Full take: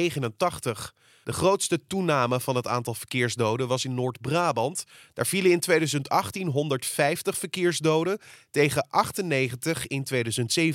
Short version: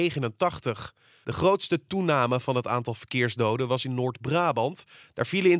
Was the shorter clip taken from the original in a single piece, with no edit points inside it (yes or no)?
yes